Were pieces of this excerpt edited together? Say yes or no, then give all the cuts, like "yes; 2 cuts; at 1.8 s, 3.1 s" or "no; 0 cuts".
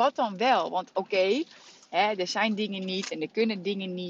no; 0 cuts